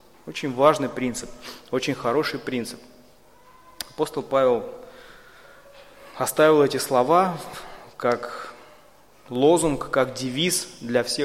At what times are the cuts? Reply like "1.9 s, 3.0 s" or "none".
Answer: none